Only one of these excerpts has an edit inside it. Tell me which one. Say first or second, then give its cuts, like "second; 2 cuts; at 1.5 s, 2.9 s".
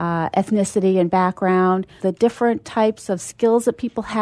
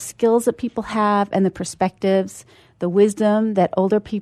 first; 1 cut; at 2.0 s